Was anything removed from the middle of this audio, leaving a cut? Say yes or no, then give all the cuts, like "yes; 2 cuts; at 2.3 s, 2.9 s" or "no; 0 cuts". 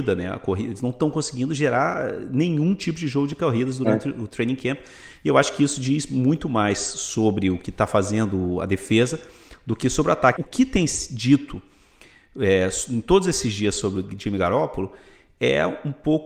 yes; 1 cut; at 10.4 s